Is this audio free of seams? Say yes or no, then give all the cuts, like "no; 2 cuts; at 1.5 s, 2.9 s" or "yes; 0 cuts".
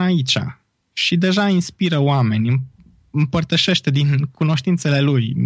yes; 0 cuts